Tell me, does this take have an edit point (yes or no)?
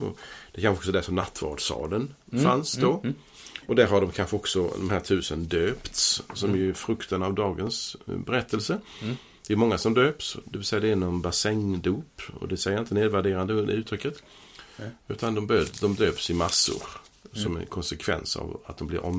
no